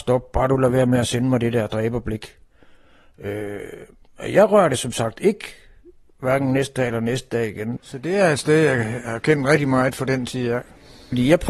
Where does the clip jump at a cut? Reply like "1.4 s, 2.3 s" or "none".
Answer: 7.8 s